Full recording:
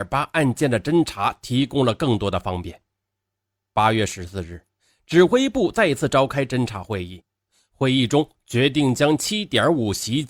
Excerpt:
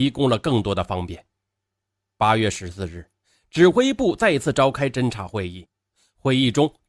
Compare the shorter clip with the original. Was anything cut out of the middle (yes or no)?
no